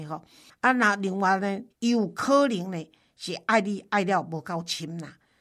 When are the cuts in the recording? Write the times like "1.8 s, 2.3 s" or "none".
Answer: 1.7 s